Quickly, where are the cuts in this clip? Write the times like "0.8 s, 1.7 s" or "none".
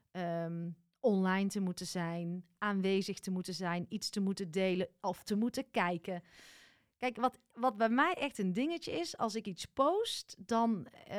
none